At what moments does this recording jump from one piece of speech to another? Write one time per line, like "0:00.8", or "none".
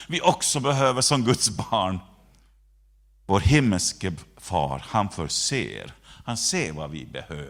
0:03.2